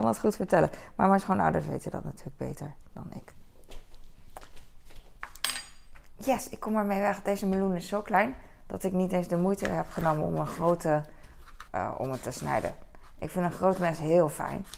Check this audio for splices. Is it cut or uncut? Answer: cut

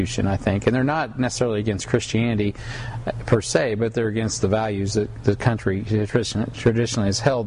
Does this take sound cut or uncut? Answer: uncut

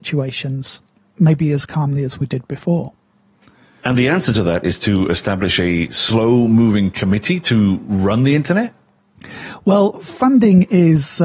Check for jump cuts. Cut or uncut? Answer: uncut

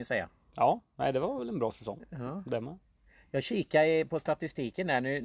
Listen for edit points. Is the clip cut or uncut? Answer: uncut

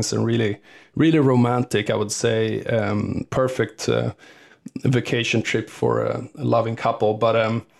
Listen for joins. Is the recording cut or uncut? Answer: uncut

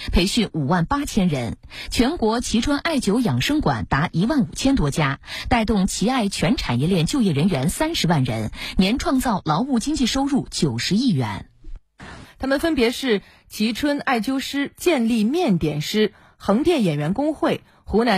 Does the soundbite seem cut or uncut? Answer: cut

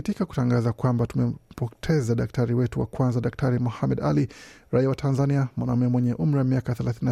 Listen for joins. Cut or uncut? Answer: uncut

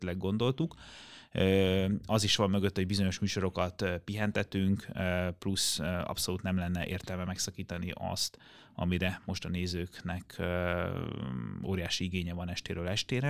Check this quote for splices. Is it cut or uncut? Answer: uncut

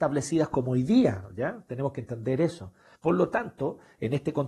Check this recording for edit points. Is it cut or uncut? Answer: cut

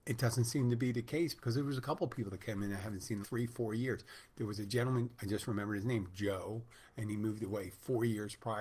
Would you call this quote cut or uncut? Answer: cut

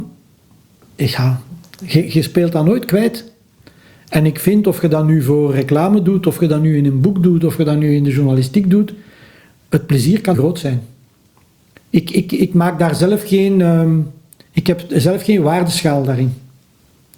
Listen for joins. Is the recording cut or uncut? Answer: cut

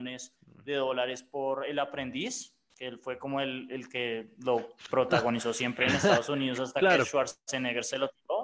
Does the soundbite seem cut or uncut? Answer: uncut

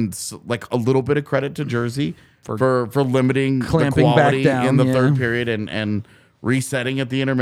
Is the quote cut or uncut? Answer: uncut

